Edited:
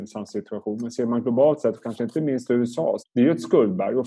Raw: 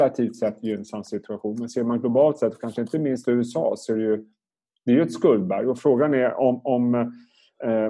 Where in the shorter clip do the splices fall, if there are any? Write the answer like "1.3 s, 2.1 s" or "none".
3.0 s